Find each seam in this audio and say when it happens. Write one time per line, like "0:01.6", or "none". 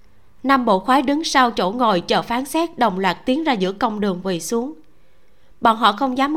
none